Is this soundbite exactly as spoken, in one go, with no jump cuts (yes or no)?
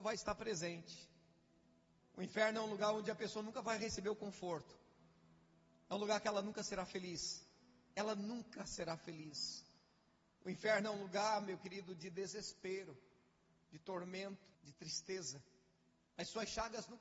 no